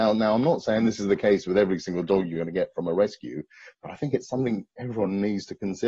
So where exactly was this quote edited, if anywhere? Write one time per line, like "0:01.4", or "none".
none